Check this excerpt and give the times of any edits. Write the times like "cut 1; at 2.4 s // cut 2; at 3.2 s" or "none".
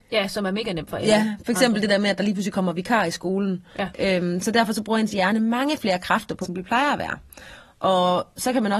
cut 1; at 3.9 s // cut 2; at 6.4 s

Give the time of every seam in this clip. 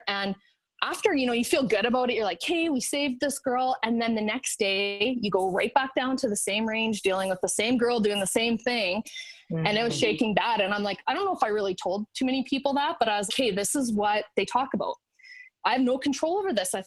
cut 1; at 9.4 s // cut 2; at 13.3 s

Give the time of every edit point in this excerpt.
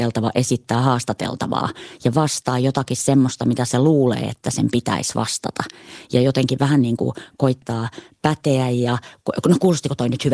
none

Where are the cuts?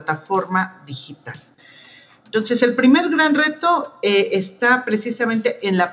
none

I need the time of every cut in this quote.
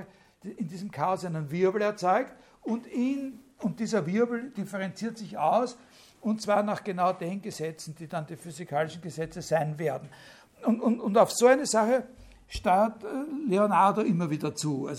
none

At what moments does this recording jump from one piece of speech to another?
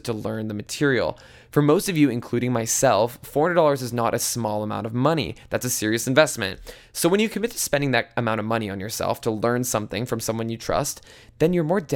none

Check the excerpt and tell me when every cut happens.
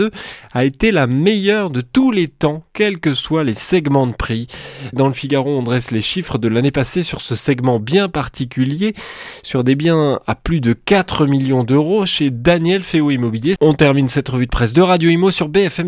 cut 1; at 4.9 s // cut 2; at 13.6 s

